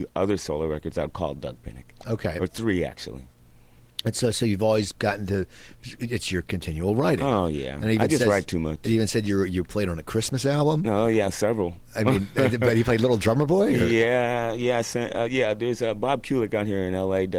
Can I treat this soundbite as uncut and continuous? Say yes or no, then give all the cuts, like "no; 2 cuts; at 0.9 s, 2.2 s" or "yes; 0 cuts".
yes; 0 cuts